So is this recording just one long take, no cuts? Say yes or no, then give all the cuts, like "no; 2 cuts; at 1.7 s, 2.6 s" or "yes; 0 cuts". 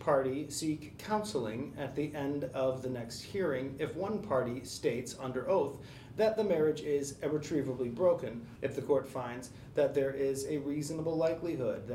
no; 1 cut; at 8.6 s